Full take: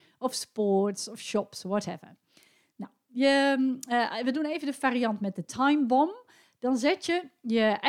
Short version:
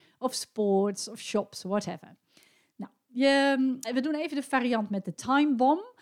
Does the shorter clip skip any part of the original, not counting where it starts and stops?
yes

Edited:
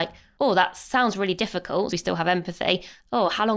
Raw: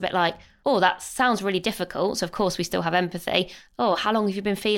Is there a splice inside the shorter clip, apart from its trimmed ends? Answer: yes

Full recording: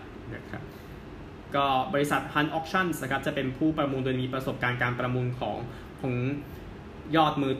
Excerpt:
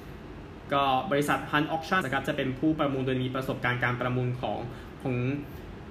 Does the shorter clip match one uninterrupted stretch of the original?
no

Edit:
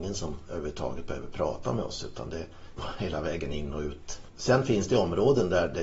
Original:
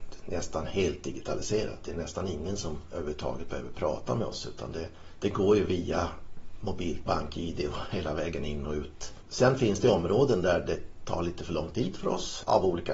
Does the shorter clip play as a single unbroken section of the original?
no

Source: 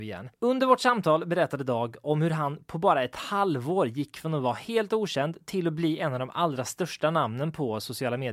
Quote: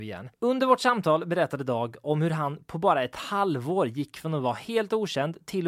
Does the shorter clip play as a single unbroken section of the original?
yes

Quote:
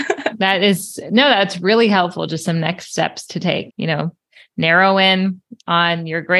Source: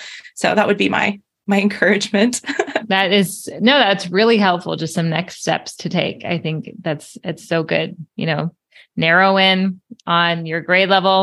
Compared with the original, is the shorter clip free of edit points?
no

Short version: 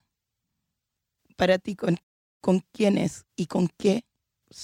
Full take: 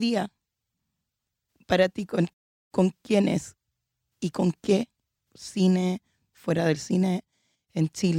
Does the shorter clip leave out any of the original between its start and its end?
yes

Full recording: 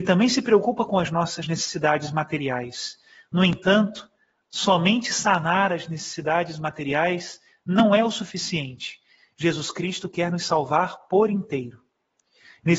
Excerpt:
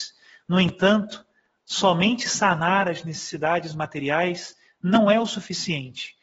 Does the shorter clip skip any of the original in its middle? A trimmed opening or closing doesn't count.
no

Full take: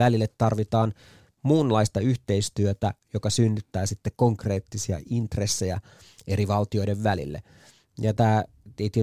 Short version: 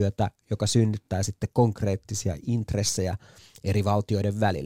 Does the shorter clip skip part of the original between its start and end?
no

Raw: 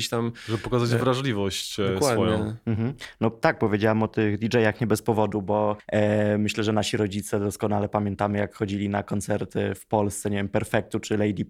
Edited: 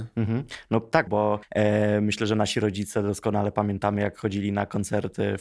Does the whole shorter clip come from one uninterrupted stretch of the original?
no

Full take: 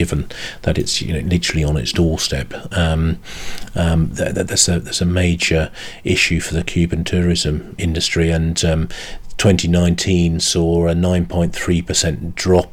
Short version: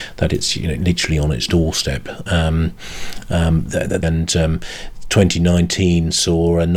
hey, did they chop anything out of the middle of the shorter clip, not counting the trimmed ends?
yes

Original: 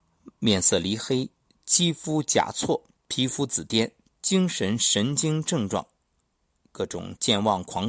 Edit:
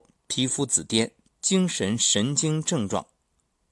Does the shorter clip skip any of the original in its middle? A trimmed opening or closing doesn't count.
no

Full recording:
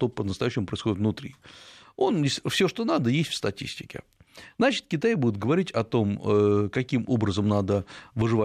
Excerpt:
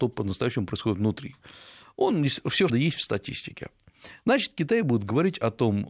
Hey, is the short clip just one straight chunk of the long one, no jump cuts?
no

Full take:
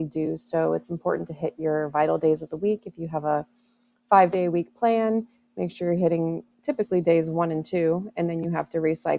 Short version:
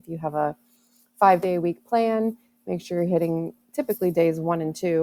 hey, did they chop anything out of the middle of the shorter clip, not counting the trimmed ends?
no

